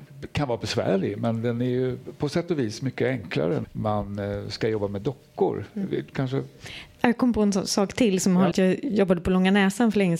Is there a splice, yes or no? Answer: yes